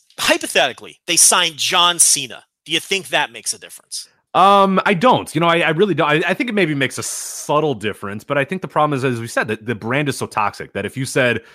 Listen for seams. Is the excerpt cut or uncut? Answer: uncut